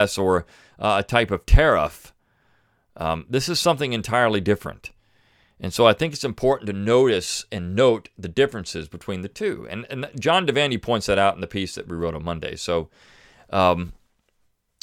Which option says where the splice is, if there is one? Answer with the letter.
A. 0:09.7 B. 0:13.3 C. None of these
C